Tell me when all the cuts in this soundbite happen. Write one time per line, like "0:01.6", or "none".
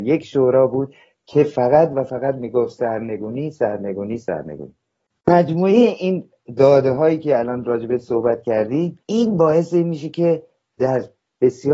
0:09.0